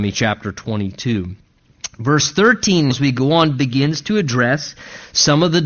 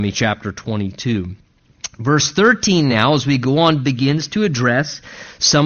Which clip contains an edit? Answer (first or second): first